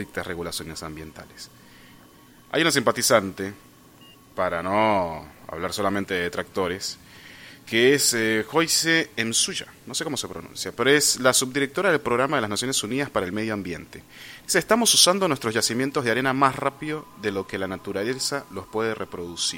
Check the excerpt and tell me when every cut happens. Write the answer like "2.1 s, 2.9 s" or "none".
none